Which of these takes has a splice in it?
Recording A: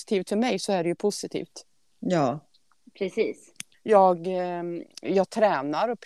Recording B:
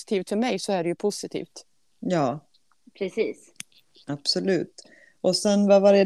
A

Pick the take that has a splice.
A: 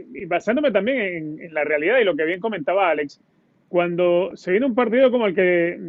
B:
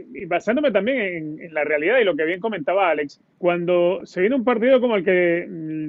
B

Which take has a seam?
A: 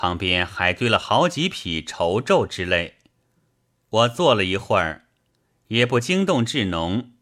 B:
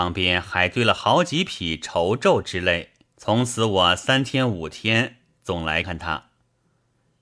B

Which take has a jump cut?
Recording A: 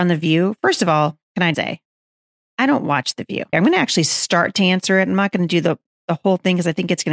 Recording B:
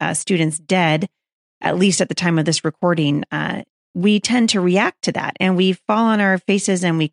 A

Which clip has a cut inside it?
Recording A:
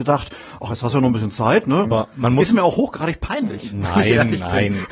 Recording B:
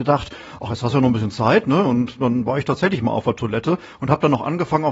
A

